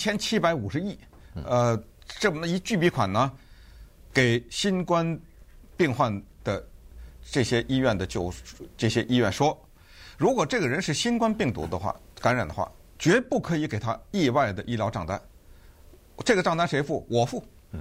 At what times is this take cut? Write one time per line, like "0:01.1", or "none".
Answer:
none